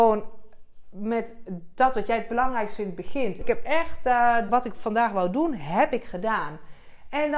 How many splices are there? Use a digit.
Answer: 2